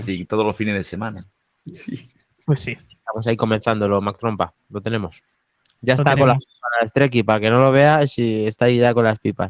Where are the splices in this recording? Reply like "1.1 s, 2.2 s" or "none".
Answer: 2.4 s